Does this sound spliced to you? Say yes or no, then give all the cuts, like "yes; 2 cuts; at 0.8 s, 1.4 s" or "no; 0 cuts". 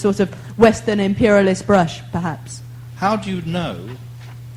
yes; 1 cut; at 3.0 s